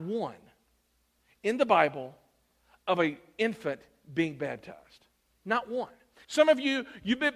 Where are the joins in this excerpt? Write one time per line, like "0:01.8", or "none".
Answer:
0:06.2